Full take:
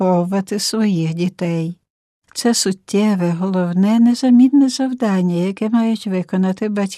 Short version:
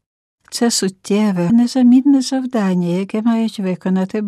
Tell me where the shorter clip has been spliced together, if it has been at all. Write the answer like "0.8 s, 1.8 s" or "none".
1.5 s